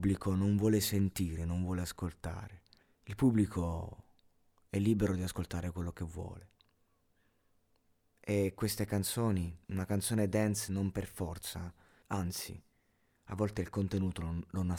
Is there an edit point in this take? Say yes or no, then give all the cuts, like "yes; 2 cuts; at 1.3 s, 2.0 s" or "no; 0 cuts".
yes; 3 cuts; at 2.8 s, 9.6 s, 12.0 s